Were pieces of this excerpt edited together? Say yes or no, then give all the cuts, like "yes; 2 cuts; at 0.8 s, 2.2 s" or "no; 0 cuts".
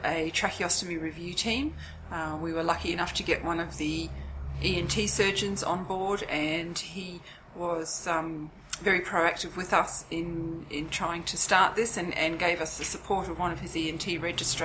no; 0 cuts